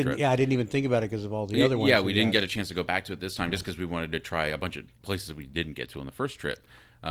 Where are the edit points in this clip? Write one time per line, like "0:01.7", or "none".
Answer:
none